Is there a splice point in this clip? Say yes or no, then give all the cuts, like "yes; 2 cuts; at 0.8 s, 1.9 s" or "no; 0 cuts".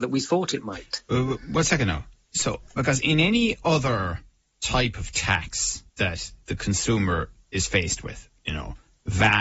yes; 1 cut; at 5.9 s